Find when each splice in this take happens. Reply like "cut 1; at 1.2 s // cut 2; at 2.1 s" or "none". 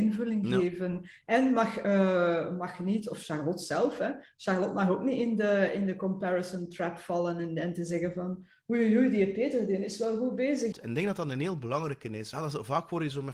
cut 1; at 10.7 s // cut 2; at 12.3 s